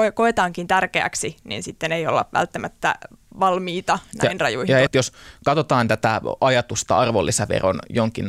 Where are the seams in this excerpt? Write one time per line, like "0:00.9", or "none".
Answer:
0:04.9

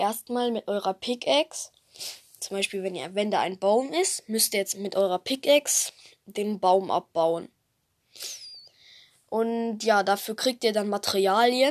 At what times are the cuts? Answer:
none

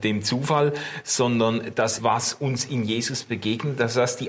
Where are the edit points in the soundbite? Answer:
0:02.0

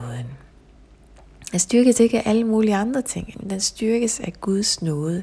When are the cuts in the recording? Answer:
0:03.3

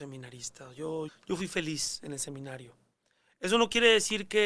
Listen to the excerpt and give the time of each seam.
0:01.1

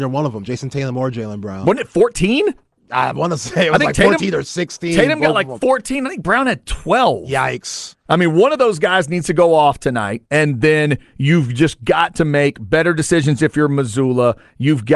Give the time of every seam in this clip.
0:10.2

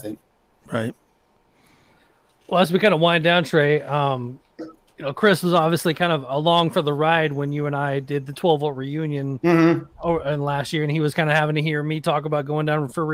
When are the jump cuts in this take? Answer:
none

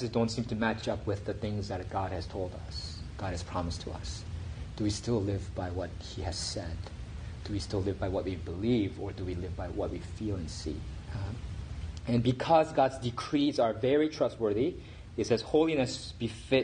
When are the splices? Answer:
0:11.1

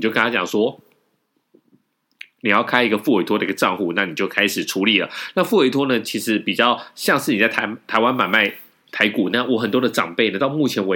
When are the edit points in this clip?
none

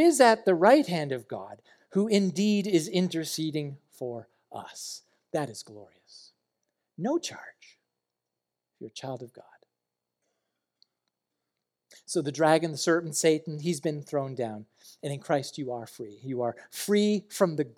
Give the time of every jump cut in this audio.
none

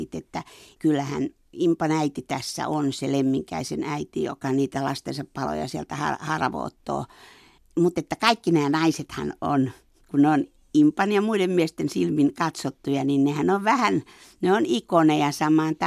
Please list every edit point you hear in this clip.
none

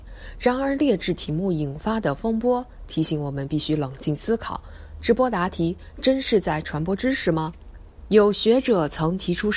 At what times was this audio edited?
0:08.0

